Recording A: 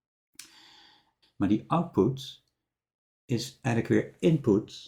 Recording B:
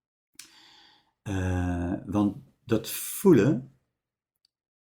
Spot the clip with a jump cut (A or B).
A